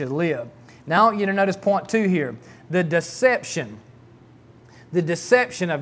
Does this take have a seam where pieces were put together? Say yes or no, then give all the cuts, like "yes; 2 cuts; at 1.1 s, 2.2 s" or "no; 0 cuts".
no; 0 cuts